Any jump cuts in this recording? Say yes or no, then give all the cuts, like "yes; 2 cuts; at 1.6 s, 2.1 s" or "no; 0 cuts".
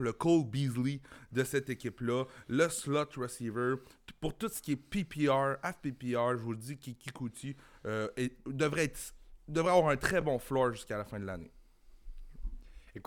no; 0 cuts